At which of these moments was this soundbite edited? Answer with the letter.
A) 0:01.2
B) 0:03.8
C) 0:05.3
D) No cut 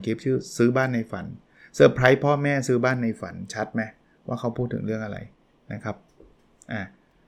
D